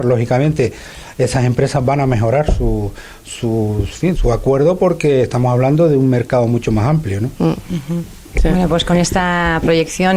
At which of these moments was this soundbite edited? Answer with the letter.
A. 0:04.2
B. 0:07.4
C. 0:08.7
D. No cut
A